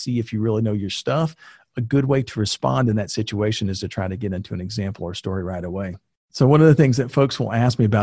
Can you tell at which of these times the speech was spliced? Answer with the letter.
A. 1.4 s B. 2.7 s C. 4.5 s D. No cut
D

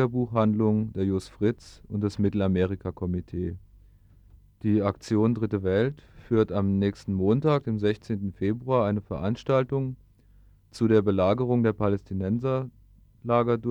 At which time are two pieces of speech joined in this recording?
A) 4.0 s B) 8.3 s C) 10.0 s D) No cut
D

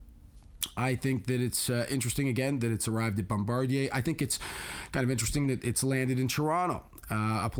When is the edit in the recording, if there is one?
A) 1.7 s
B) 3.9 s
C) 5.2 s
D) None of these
D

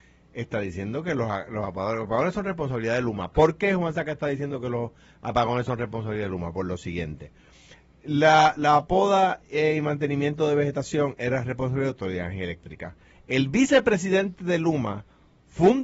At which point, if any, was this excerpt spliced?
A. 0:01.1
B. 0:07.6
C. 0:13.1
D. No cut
C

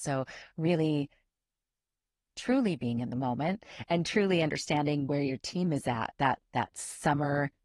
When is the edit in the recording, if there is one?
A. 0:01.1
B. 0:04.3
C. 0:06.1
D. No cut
D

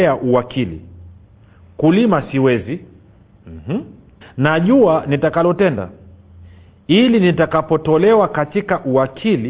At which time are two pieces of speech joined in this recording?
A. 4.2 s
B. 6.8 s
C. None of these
A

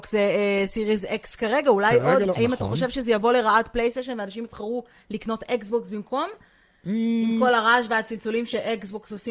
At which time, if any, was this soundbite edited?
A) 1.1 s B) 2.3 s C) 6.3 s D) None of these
B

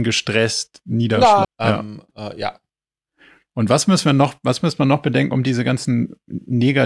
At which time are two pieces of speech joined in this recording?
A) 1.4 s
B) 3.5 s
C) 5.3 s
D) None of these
A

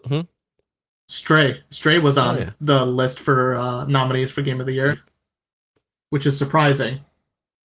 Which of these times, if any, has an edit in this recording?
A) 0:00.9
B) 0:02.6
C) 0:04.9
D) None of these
C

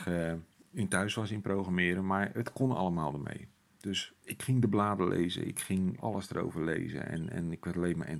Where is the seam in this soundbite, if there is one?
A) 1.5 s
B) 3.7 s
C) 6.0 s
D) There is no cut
C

